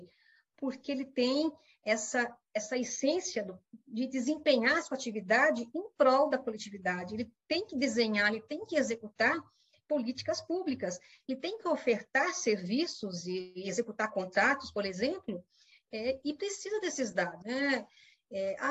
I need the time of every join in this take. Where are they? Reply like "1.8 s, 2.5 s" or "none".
17.4 s